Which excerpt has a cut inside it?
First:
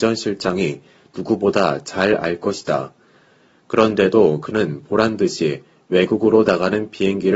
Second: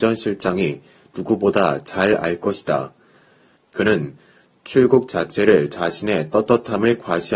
second; 1 cut; at 3.5 s

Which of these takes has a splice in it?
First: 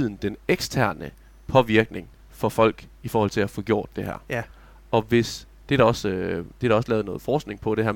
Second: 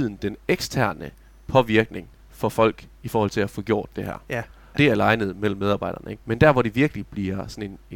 second; 2 cuts; at 4.7 s, 6.2 s

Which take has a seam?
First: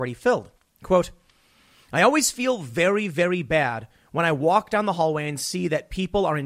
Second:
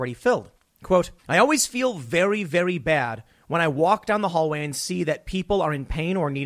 second; 1 cut; at 1.2 s

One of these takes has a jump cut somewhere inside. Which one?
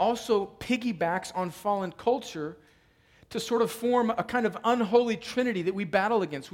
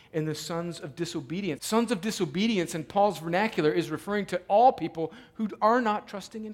second; 1 cut; at 1.6 s

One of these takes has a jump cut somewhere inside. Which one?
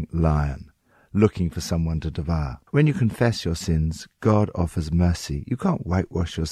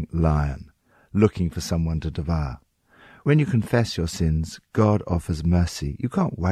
first; 1 cut; at 2.7 s

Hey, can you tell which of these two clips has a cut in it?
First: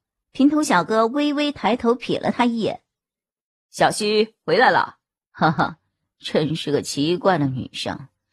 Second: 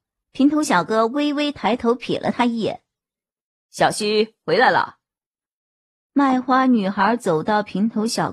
first; 1 cut; at 5.2 s

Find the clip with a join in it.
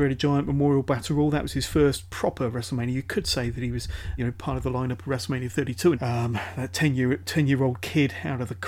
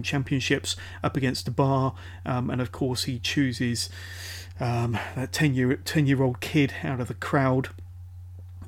first; 2 cuts; at 4.2 s, 5.9 s

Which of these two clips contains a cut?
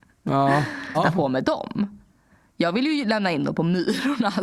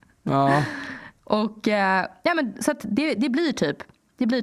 first; 1 cut; at 0.9 s

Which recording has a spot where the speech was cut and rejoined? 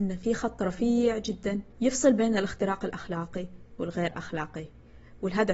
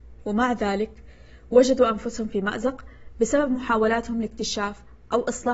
first; 1 cut; at 1.7 s

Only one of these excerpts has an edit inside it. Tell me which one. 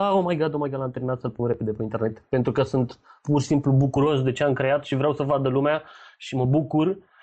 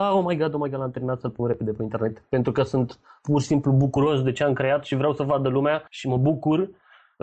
second; 1 cut; at 5.9 s

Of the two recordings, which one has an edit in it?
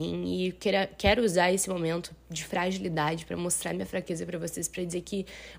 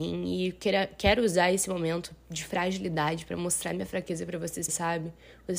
second; 1 cut; at 4.7 s

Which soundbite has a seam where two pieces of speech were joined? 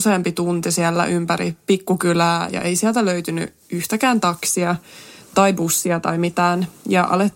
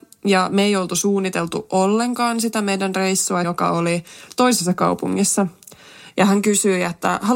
second; 2 cuts; at 3.4 s, 6.1 s

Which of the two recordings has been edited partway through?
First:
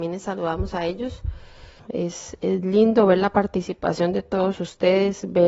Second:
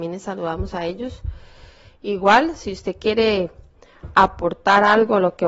first; 1 cut; at 1.8 s

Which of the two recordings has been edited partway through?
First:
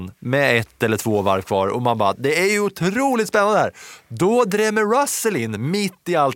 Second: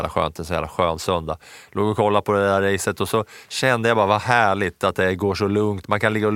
second; 1 cut; at 1.7 s

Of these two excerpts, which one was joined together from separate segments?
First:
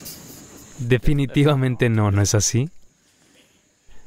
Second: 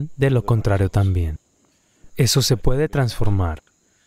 second; 1 cut; at 2.1 s

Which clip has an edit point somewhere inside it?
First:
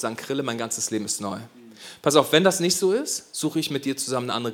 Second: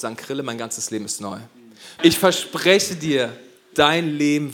second; 1 cut; at 2.0 s

